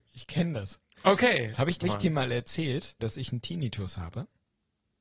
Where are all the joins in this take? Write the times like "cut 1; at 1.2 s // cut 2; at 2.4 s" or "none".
cut 1; at 1.8 s // cut 2; at 3.0 s